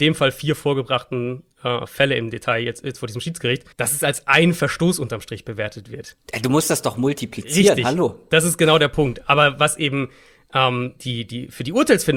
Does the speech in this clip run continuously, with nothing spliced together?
no; 1 cut; at 3.7 s

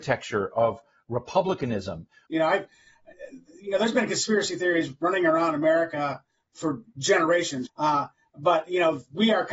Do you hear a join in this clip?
yes; 2 cuts; at 2.3 s, 7.7 s

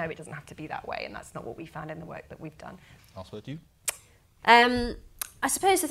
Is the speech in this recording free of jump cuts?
no; 1 cut; at 3.0 s

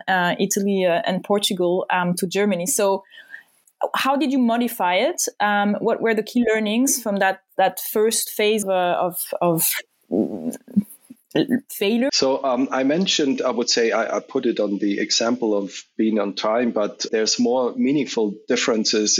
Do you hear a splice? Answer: yes; 3 cuts; at 8.6 s, 12.1 s, 17.1 s

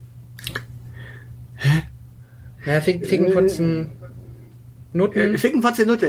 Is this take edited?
no; 0 cuts

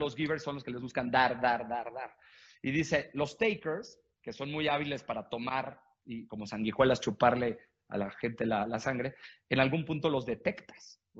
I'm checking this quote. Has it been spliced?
no; 0 cuts

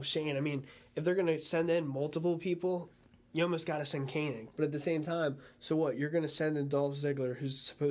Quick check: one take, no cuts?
no; 1 cut; at 4.5 s

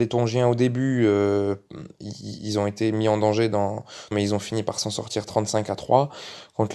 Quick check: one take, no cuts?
no; 1 cut; at 4.1 s

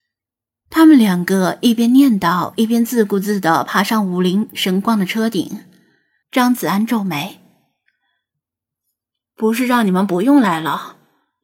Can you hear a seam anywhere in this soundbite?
yes; 1 cut; at 6.2 s

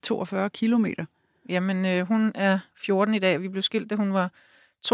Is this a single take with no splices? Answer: yes; 0 cuts

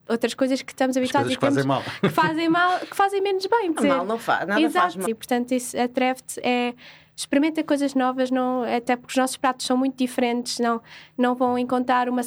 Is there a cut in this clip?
yes; 2 cuts; at 3.7 s, 5.0 s

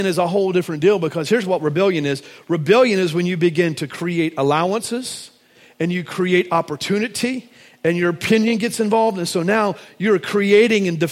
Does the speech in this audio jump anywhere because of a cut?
no; 0 cuts

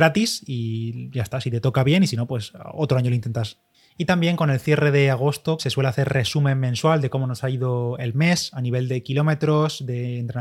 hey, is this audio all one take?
no; 1 cut; at 5.6 s

